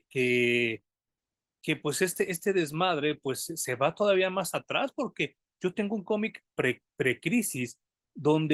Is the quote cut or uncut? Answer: uncut